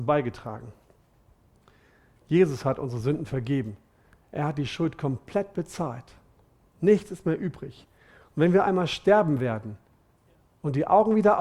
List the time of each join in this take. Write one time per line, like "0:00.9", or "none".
none